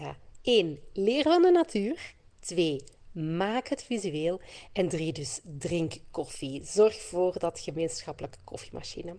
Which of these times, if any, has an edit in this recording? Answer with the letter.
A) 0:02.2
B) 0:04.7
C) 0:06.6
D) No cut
D